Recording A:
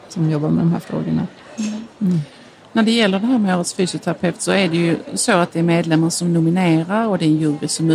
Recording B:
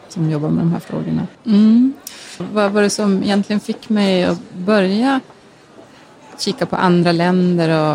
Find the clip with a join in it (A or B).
B